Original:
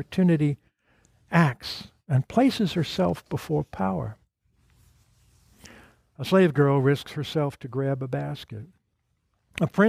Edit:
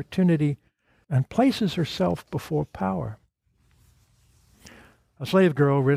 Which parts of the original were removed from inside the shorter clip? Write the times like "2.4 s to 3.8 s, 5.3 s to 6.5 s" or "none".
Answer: 1.0 s to 2.0 s